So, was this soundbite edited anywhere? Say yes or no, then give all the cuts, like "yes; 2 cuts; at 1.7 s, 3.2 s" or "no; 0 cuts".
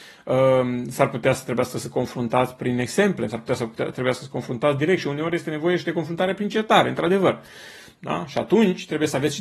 yes; 2 cuts; at 3.3 s, 8.0 s